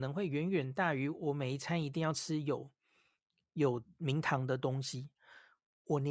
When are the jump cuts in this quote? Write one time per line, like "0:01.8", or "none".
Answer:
none